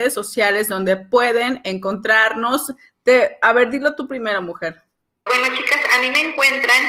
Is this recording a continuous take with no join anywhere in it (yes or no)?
no